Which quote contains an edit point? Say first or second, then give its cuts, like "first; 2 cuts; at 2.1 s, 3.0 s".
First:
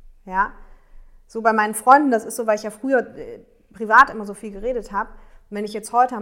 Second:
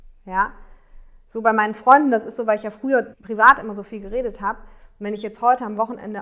second; 1 cut; at 3.1 s